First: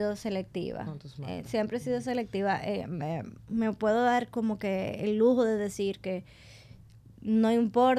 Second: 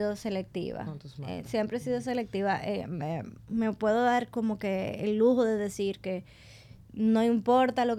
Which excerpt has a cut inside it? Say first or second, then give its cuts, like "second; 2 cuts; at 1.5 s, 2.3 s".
second; 1 cut; at 6.8 s